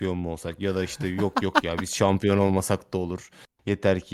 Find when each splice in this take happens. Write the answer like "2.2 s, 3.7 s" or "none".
none